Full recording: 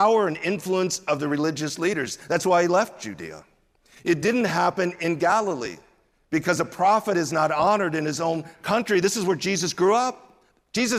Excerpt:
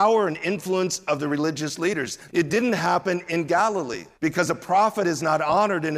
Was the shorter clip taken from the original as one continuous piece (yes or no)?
no